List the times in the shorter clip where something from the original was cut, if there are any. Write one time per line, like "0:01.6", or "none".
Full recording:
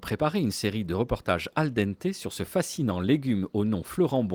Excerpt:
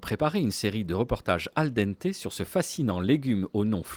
none